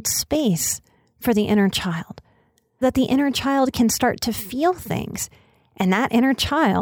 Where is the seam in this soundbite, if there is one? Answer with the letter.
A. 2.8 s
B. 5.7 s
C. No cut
A